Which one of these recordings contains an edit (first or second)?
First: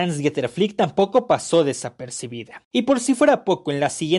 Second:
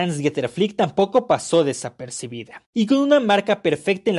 first